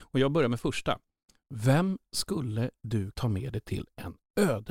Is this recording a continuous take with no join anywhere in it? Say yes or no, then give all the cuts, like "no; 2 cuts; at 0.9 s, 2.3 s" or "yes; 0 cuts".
no; 1 cut; at 3.1 s